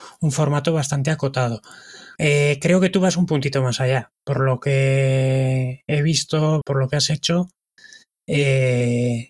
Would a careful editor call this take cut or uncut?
cut